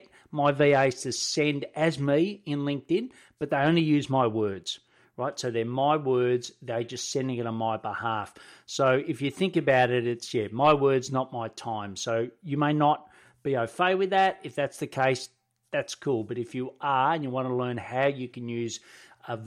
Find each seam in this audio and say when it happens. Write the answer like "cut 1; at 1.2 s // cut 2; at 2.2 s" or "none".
none

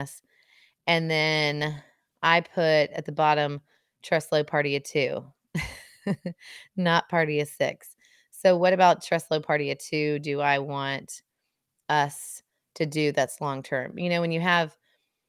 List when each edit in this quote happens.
none

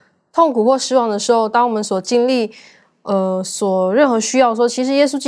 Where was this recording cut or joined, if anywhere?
none

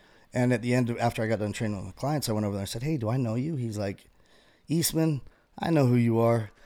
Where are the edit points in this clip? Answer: none

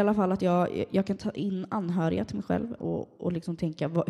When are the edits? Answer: cut 1; at 2.8 s

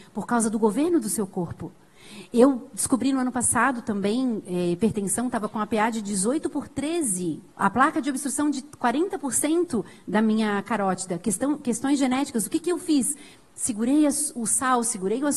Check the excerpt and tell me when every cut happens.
cut 1; at 7.5 s

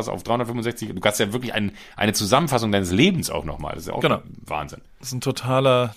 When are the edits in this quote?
none

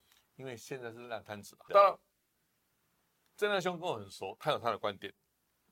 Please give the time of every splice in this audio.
cut 1; at 1.7 s

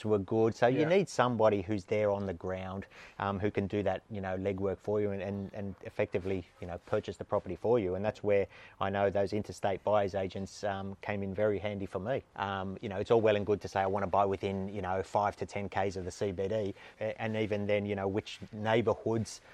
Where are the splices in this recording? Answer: cut 1; at 12.3 s // cut 2; at 16.9 s

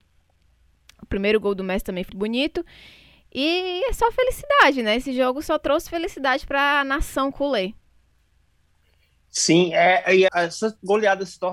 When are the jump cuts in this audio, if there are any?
cut 1; at 2.1 s // cut 2; at 10.3 s

